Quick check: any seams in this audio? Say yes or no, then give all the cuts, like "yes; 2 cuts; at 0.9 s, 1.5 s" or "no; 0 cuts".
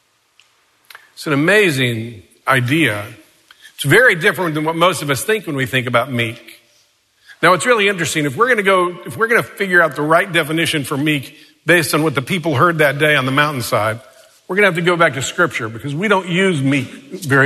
no; 0 cuts